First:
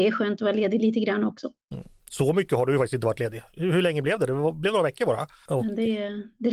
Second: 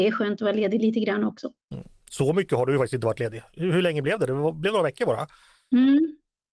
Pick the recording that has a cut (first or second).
first